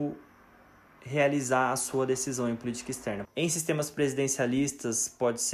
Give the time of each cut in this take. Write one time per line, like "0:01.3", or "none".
0:03.2